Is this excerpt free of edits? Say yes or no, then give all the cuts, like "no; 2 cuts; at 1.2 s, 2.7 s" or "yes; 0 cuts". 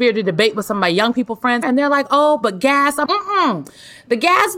no; 2 cuts; at 1.6 s, 3.1 s